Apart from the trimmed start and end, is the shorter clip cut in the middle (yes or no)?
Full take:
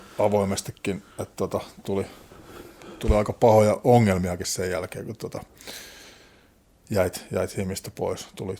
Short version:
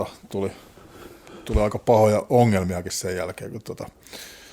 no